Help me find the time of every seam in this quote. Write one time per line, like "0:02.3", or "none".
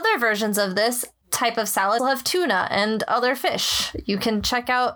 0:02.0